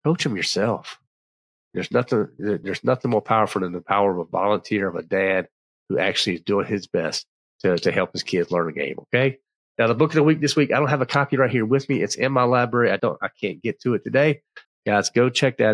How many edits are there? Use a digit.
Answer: 2